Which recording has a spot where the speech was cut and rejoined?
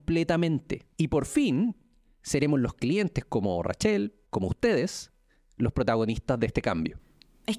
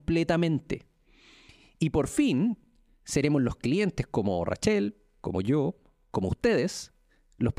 first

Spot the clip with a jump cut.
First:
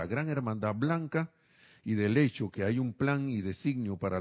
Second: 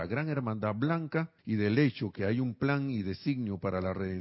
second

